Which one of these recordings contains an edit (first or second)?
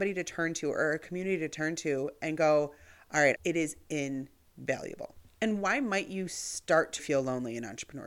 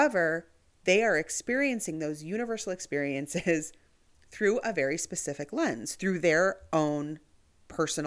first